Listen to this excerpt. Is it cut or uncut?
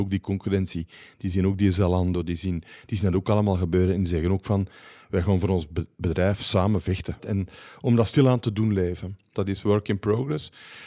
cut